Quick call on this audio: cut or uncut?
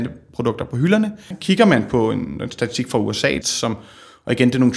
cut